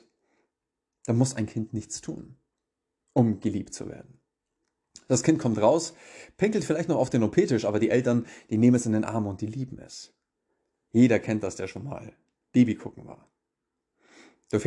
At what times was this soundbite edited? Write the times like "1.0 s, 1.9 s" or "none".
none

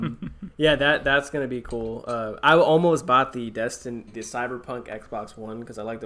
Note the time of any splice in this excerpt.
4.1 s

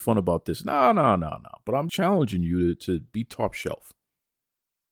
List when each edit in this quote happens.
1.9 s

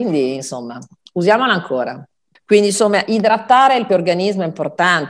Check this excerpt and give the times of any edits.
2.4 s, 3.9 s

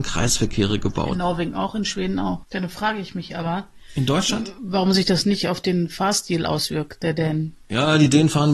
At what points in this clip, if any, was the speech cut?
2.4 s

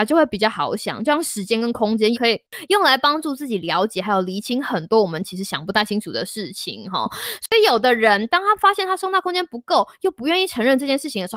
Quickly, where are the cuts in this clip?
2.1 s

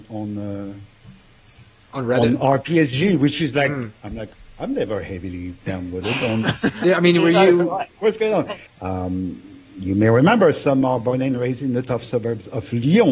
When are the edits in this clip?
6.8 s, 8.7 s

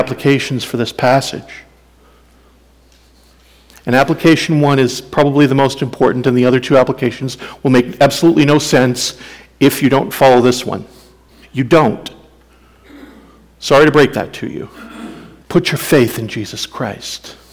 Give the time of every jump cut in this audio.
11.4 s, 15.4 s

